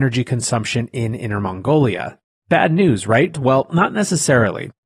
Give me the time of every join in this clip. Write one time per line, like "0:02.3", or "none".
0:03.3